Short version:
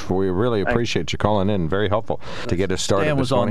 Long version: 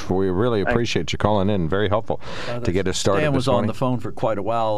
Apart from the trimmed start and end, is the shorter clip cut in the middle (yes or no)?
yes